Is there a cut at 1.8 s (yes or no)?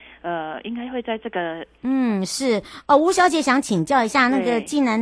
yes